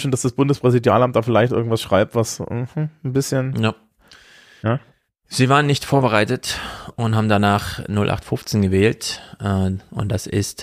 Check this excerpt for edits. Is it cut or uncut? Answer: uncut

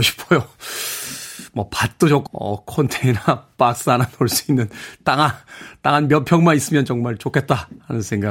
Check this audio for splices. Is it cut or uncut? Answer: cut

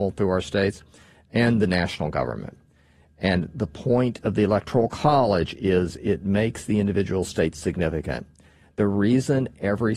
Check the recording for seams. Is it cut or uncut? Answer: uncut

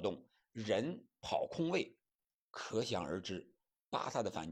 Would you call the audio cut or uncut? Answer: cut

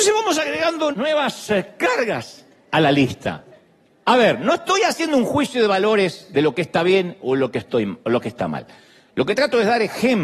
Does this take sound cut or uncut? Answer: cut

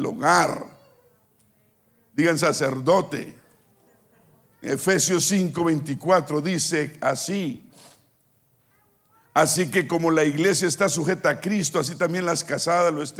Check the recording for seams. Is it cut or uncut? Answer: cut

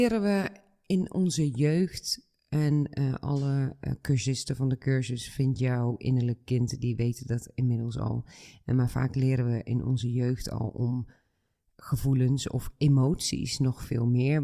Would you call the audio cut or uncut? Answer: uncut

